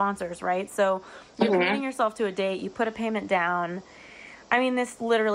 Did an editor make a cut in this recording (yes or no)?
no